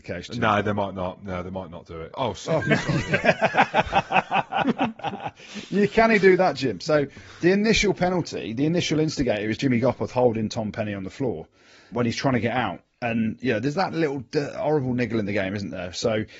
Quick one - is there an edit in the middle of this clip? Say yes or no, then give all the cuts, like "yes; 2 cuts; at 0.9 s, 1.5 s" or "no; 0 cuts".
yes; 1 cut; at 2.1 s